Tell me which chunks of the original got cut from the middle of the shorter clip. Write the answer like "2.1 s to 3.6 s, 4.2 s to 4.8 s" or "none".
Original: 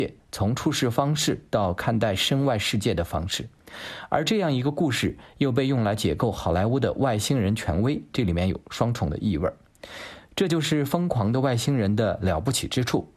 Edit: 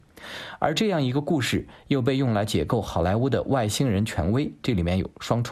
none